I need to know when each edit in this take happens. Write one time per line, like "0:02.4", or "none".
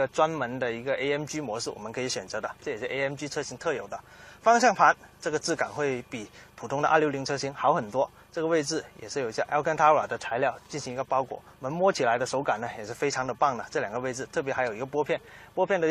none